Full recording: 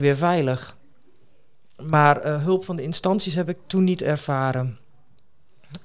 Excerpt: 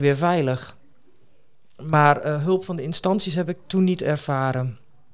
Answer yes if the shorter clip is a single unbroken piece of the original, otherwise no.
yes